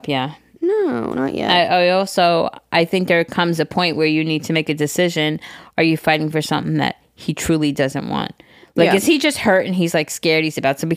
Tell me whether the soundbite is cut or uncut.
uncut